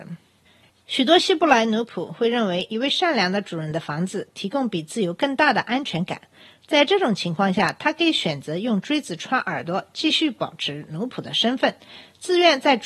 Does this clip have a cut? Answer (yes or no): no